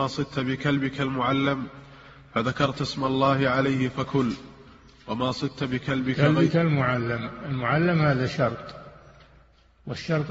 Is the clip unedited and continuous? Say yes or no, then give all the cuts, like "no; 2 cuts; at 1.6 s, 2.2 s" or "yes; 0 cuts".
yes; 0 cuts